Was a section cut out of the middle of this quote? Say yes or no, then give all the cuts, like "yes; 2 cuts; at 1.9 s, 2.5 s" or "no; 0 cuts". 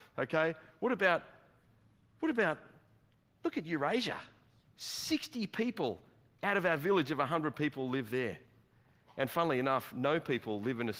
no; 0 cuts